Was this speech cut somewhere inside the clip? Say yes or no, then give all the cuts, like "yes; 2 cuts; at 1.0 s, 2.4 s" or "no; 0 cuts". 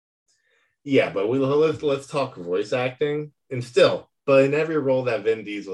yes; 1 cut; at 4.2 s